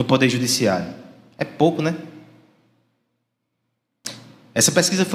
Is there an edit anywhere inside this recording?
no; 0 cuts

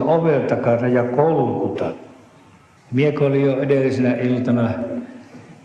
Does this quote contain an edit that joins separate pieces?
yes; 1 cut; at 2.8 s

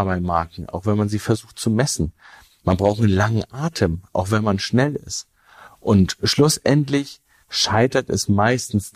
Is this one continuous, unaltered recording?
yes; 0 cuts

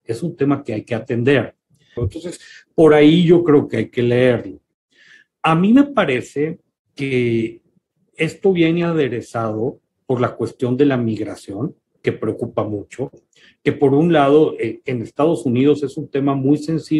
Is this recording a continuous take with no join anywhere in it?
no; 2 cuts; at 2.0 s, 12.0 s

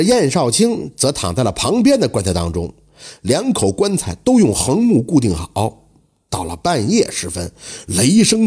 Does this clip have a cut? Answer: no; 0 cuts

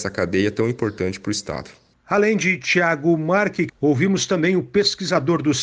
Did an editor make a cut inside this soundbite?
yes; 1 cut; at 3.7 s

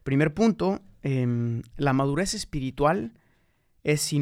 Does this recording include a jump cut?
no; 0 cuts

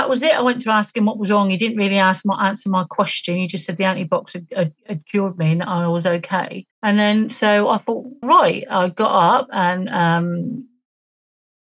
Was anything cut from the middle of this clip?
yes; 2 cuts; at 6.7 s, 8.2 s

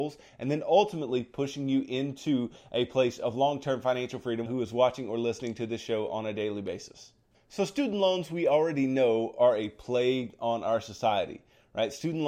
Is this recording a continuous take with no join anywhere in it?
no; 1 cut; at 4.5 s

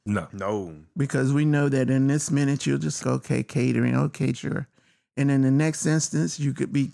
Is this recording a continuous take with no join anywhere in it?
no; 2 cuts; at 3.0 s, 4.3 s

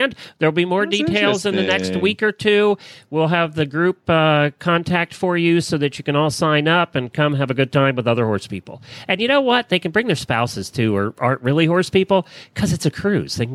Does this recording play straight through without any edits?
yes; 0 cuts

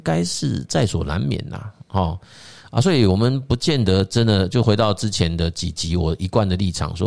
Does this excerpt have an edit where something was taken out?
no; 0 cuts

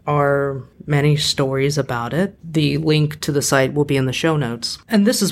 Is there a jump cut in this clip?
no; 0 cuts

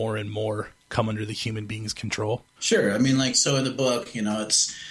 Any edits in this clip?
yes; 1 cut; at 2.6 s

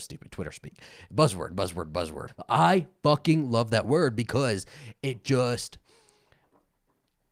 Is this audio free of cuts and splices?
yes; 0 cuts

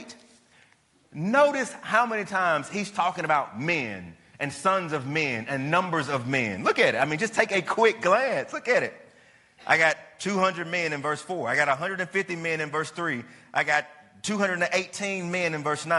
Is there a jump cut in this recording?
no; 0 cuts

